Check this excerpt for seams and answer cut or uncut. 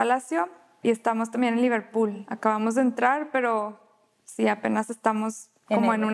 uncut